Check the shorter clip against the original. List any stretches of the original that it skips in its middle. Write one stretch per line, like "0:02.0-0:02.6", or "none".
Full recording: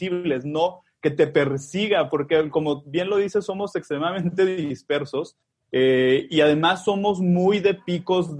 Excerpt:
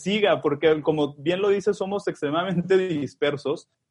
none